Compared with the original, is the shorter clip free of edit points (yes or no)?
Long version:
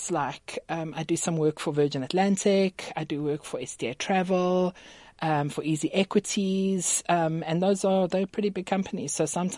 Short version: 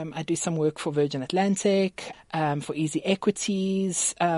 no